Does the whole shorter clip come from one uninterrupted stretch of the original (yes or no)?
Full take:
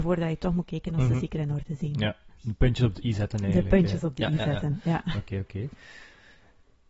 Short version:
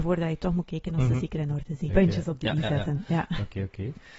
no